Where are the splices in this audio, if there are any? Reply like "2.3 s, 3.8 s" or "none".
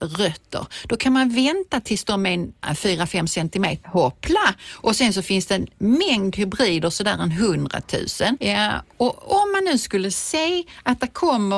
2.6 s, 3.8 s, 8.4 s